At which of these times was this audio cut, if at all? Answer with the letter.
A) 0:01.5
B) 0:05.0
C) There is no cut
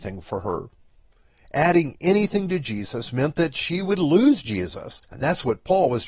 B